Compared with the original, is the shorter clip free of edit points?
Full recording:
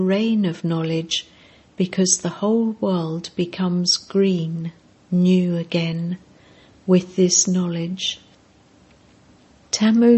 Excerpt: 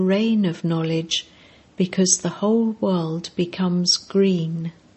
yes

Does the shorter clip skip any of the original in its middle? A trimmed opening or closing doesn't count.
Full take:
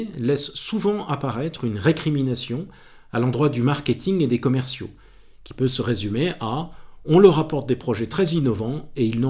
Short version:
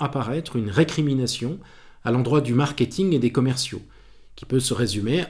no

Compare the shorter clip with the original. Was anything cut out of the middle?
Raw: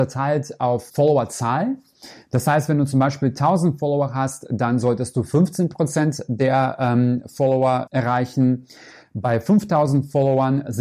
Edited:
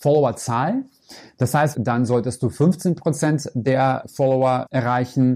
yes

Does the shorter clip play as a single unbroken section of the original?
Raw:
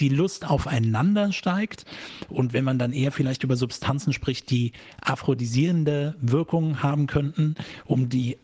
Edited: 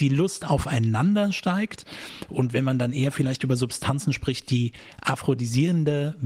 yes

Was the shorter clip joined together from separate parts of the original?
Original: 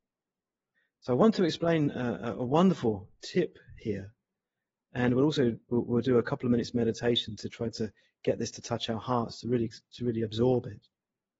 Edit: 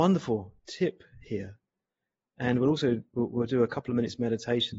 no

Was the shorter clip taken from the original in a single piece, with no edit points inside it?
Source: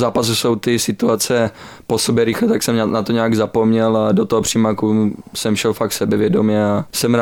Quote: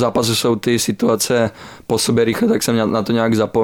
yes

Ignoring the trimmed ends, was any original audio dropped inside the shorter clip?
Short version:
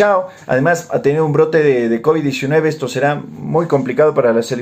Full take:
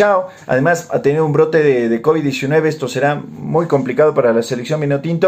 no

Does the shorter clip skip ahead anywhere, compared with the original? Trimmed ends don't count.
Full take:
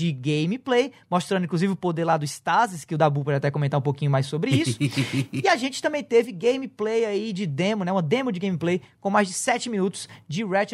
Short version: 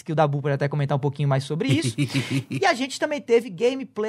no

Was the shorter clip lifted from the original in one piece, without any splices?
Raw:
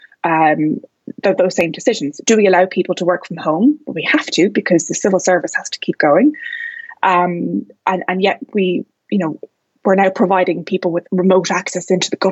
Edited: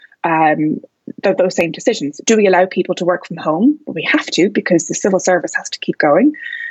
yes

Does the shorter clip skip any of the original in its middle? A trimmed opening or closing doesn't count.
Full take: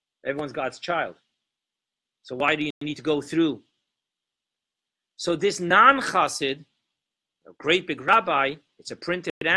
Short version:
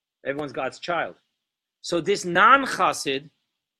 yes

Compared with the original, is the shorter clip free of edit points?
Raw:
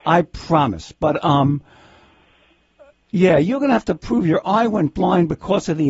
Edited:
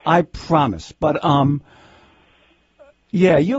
yes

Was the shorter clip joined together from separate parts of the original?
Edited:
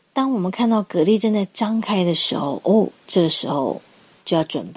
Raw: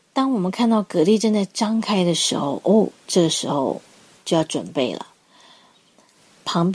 no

